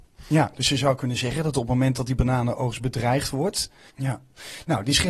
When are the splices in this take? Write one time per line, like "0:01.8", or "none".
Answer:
0:03.9